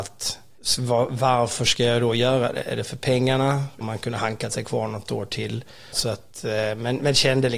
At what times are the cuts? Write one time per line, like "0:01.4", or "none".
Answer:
0:05.9